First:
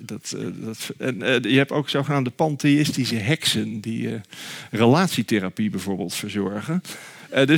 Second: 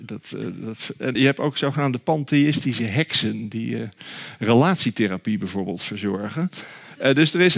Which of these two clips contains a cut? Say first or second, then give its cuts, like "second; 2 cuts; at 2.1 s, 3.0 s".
second; 1 cut; at 1.2 s